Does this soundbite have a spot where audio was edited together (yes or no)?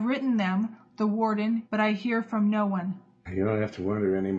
yes